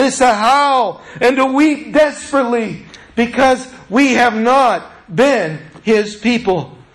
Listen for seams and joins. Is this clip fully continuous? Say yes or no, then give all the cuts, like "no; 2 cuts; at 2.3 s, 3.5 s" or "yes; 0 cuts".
yes; 0 cuts